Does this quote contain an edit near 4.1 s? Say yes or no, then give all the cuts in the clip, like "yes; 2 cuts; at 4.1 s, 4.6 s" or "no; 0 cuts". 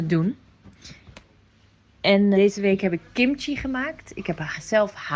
no; 1 cut; at 2.3 s